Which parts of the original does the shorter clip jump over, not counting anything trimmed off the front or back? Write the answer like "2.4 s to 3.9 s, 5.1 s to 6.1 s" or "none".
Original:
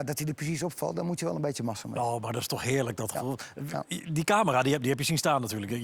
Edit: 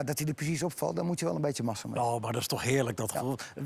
none